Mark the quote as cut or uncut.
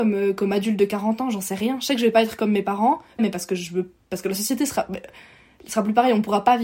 cut